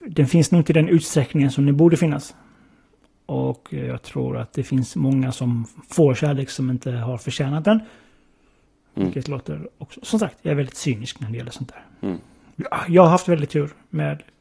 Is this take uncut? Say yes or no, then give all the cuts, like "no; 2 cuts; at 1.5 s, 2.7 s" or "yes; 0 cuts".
yes; 0 cuts